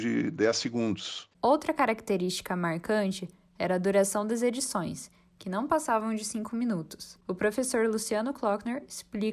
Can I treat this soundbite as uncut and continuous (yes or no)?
no